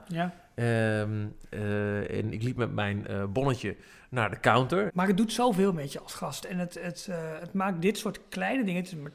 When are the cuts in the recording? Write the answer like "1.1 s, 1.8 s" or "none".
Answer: 4.9 s